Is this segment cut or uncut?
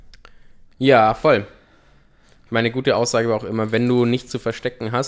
uncut